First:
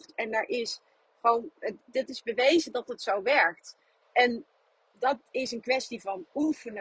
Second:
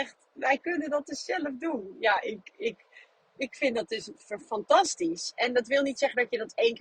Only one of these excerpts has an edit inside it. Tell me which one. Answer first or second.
first